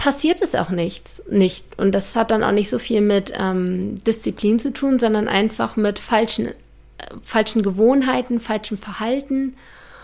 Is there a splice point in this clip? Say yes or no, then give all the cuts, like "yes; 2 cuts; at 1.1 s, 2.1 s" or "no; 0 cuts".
no; 0 cuts